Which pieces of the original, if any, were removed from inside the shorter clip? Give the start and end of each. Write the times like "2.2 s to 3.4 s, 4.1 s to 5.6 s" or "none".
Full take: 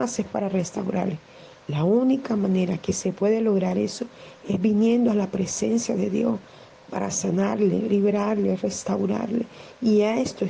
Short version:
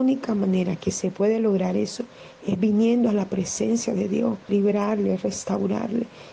6.5 s to 7.9 s